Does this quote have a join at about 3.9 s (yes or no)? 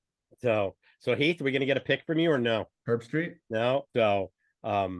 yes